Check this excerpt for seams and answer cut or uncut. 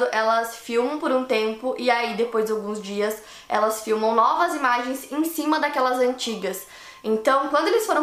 uncut